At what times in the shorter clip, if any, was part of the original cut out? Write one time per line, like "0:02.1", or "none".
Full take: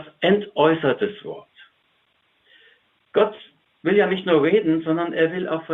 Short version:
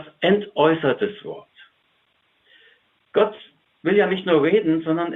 none